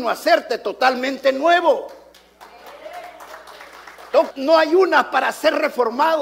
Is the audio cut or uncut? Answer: cut